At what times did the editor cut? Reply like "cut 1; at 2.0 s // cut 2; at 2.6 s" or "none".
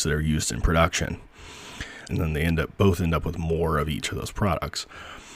cut 1; at 2.1 s